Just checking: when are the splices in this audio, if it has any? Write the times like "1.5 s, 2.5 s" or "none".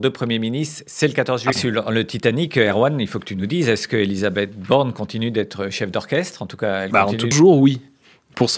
1.5 s, 7.3 s